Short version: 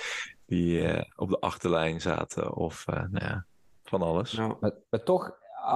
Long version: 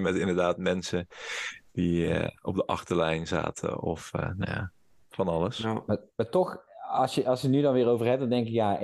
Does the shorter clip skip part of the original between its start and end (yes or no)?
no